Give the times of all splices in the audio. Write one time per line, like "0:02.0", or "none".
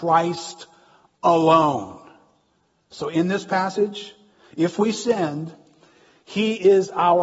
0:02.9